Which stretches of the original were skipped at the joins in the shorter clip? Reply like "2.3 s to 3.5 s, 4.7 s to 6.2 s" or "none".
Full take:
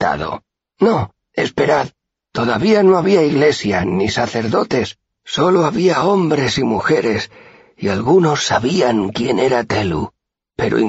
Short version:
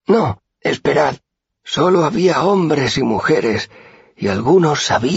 2.2 s to 5.1 s